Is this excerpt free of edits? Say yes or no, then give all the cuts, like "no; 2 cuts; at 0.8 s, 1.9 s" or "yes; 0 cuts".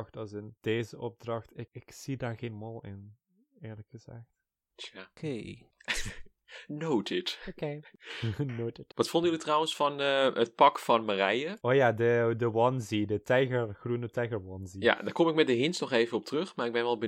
yes; 0 cuts